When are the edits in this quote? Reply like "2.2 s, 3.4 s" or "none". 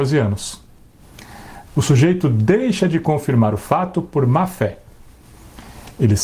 1.7 s

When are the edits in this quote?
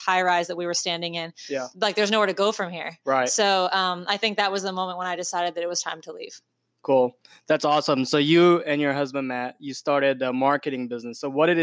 1.7 s

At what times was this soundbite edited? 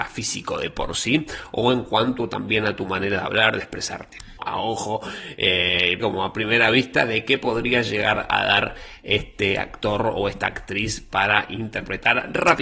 4.4 s, 6.0 s

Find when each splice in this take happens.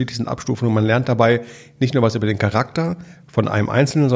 none

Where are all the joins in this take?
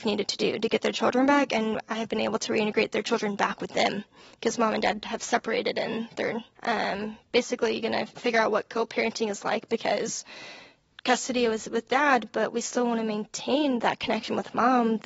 6.5 s, 8.2 s

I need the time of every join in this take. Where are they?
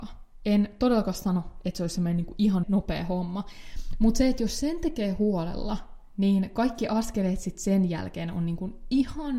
2.6 s

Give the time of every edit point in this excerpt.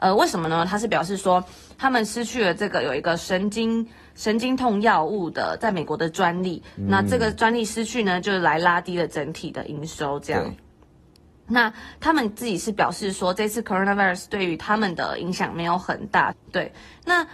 16.3 s

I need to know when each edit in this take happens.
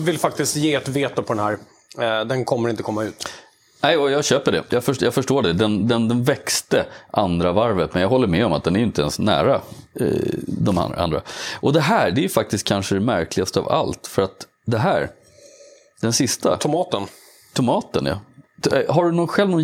5.8 s

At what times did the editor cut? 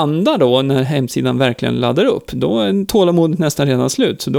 none

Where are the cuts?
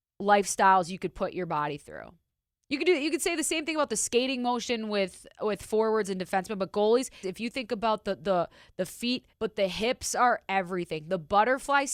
7.2 s, 9.3 s

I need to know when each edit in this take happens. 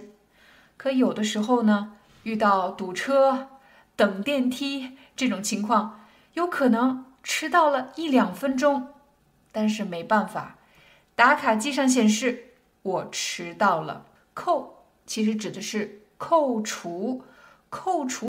14.2 s

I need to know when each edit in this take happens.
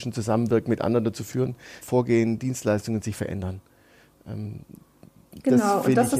1.8 s

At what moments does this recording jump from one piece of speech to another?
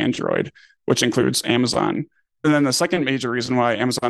2.3 s

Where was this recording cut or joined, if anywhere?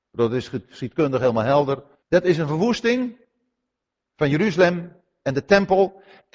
2.0 s

